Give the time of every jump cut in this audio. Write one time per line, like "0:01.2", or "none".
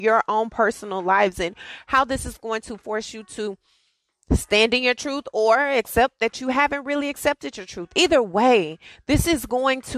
none